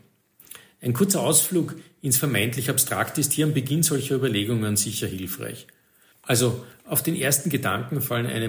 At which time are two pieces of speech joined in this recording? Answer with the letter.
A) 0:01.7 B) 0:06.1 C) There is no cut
B